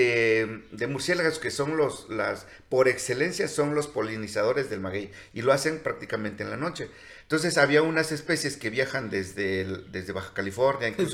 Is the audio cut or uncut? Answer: uncut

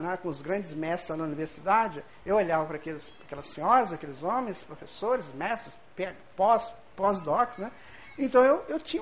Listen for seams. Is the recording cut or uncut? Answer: uncut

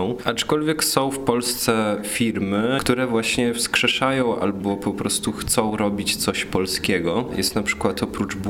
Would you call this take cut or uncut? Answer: cut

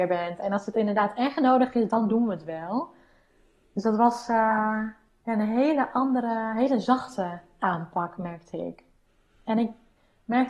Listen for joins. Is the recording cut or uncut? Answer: uncut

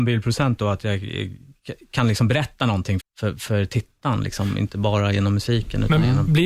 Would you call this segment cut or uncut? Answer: cut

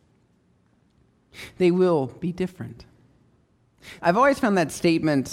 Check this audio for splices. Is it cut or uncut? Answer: cut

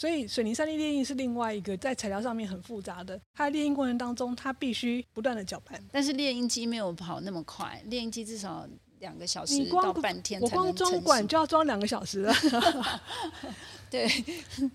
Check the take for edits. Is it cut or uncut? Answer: cut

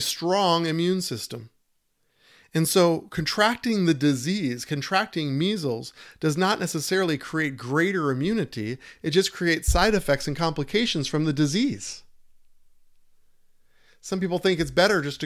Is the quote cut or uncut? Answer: uncut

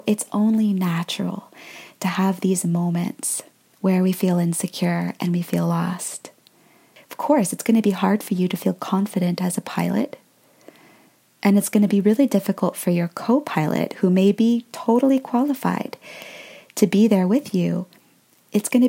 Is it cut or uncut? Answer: uncut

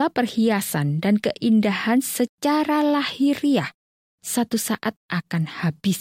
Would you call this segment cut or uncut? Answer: uncut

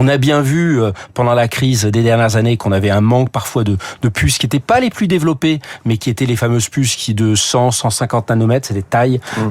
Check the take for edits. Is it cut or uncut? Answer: uncut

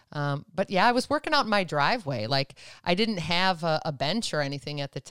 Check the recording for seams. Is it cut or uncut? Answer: uncut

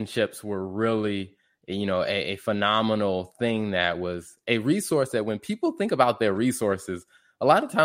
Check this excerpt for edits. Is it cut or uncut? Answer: uncut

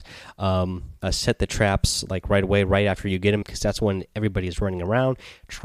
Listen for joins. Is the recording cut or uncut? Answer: cut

